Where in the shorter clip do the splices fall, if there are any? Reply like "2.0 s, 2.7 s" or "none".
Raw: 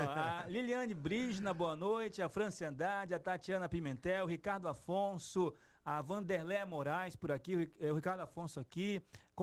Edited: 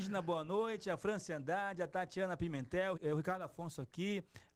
2.9 s